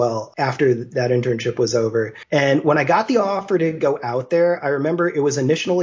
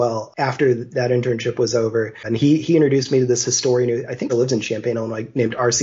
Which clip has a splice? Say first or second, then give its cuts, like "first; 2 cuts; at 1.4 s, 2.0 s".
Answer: second; 2 cuts; at 2.2 s, 4.3 s